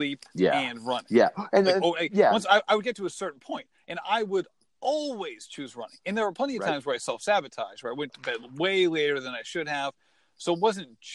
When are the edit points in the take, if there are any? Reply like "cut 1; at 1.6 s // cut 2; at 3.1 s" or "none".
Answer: none